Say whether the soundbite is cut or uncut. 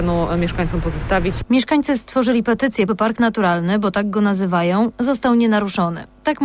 cut